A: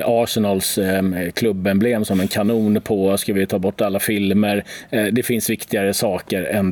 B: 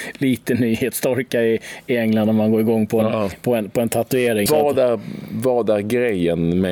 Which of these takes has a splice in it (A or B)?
B